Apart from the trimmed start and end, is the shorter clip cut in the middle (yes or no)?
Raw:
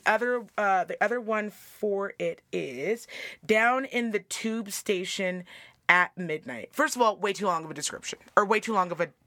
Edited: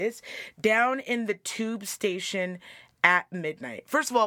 no